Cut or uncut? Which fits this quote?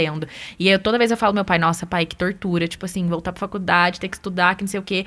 uncut